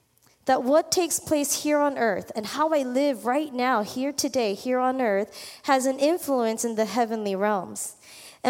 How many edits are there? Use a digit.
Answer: 0